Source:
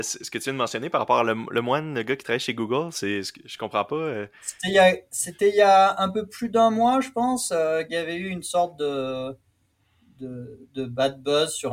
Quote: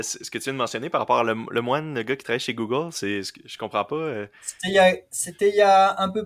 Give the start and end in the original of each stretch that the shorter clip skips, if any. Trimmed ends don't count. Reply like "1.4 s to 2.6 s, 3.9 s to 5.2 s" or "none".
none